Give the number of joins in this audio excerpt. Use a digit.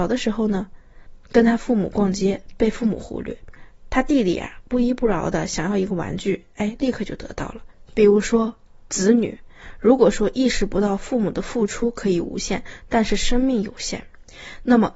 1